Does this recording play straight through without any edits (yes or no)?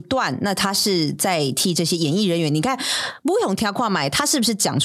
yes